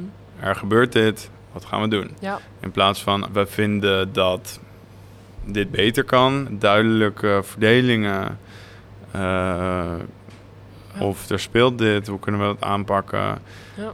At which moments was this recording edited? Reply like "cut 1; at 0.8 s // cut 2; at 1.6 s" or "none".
cut 1; at 3.2 s // cut 2; at 6.4 s // cut 3; at 10.9 s